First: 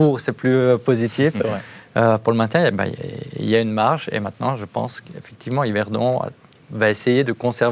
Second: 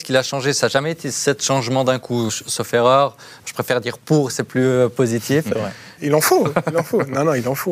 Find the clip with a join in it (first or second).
second